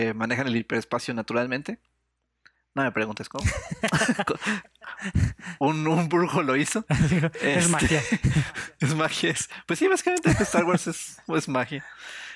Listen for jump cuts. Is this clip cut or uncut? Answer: uncut